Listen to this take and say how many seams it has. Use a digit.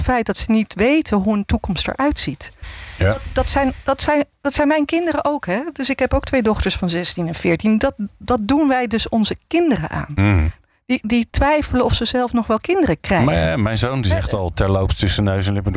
1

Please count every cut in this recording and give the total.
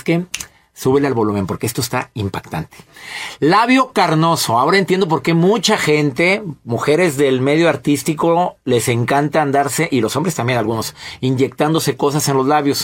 0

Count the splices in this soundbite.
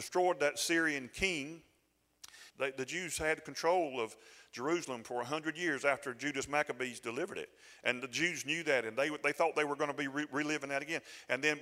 1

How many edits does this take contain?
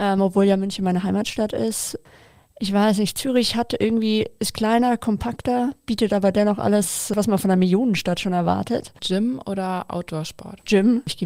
1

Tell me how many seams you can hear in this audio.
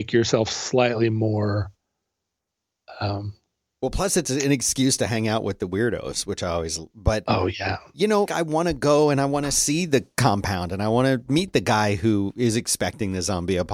2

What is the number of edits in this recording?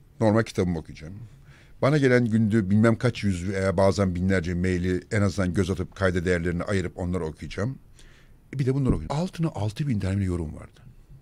1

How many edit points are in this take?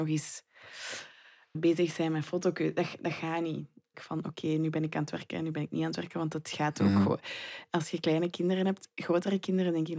2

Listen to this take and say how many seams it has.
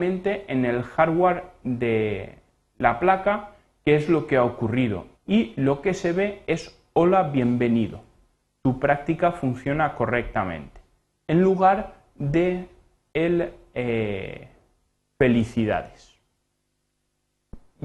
1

